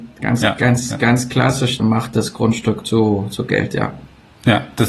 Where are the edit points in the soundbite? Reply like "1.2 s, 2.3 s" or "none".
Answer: 1.8 s